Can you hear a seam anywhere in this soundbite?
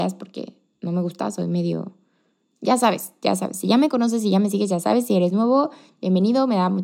no; 0 cuts

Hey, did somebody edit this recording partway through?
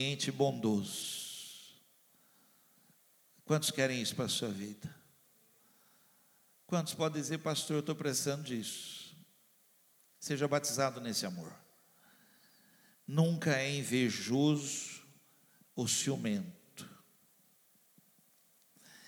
no; 0 cuts

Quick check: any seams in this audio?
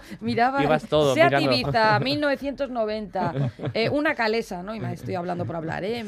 no; 0 cuts

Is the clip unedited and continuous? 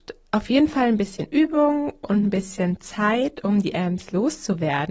yes; 0 cuts

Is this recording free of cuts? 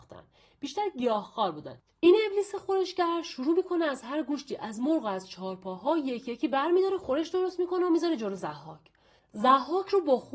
yes; 0 cuts

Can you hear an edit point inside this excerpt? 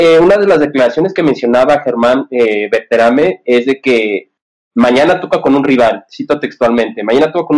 no; 0 cuts

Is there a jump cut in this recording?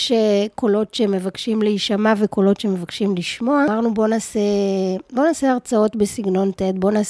no; 0 cuts

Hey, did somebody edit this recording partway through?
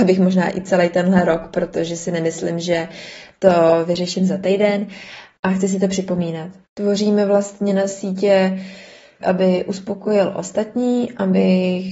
yes; 2 cuts; at 6.6 s, 9.2 s

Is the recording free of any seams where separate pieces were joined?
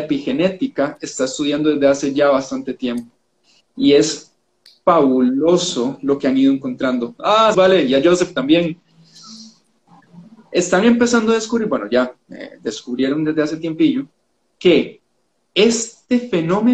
no; 1 cut; at 7.5 s

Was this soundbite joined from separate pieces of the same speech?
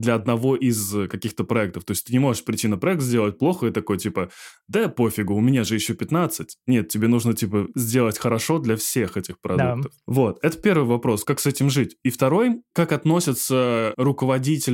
no; 0 cuts

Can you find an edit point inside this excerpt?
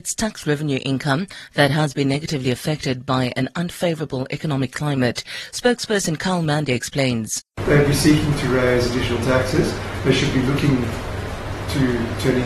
no; 0 cuts

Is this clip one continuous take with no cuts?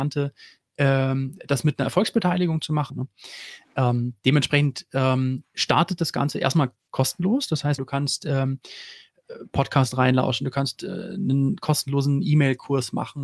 no; 2 cuts; at 2.9 s, 7.8 s

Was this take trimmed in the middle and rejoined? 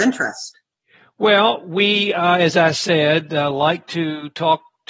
no; 0 cuts

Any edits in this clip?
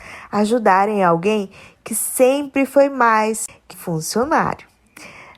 yes; 1 cut; at 3.7 s

